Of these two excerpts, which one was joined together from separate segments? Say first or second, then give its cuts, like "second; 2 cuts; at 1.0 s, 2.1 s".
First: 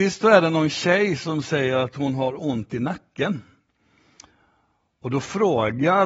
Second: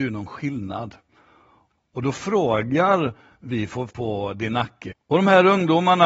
second; 3 cuts; at 1.7 s, 3.9 s, 4.9 s